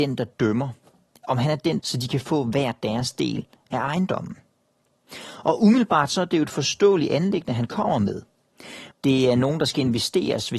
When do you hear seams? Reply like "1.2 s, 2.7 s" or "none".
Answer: 1.8 s, 8.9 s